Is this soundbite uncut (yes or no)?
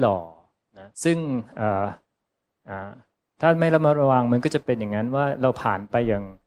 no